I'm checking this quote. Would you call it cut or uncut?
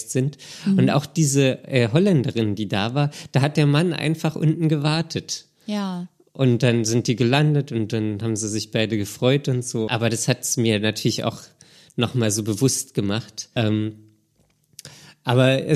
cut